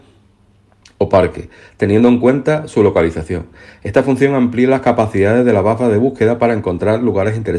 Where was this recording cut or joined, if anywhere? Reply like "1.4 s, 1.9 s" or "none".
none